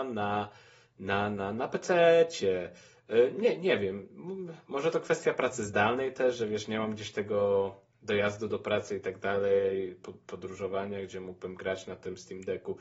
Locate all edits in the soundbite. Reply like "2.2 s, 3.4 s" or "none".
none